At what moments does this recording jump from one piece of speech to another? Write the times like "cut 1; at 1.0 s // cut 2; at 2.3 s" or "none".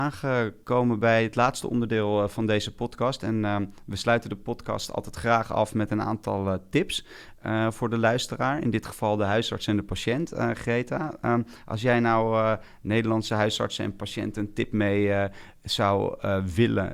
none